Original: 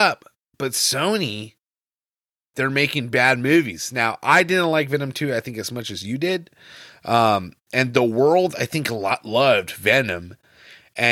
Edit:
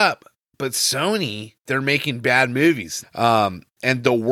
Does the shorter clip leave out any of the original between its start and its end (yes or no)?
yes